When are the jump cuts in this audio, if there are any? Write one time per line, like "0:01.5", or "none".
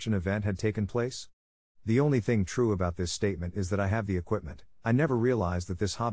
0:01.7